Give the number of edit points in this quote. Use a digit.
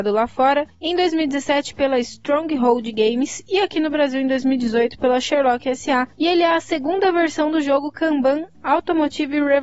0